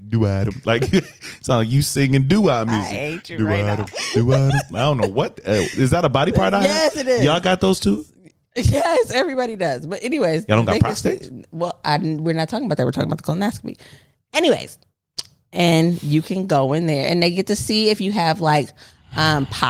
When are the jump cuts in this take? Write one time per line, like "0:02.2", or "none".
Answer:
none